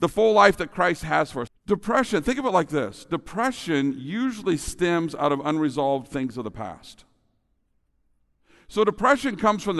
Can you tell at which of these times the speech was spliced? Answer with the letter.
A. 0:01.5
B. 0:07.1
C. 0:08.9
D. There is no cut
A